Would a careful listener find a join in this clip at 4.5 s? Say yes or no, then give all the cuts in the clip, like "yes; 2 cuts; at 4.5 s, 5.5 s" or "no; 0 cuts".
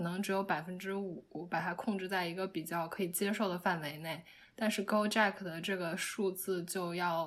no; 0 cuts